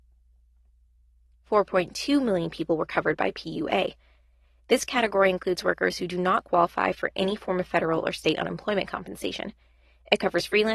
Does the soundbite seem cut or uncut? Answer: uncut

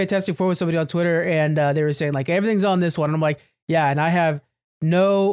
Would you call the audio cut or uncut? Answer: uncut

